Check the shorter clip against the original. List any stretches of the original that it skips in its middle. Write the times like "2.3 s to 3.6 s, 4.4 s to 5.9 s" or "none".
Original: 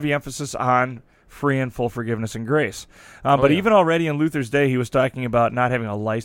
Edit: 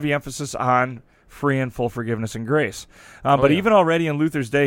none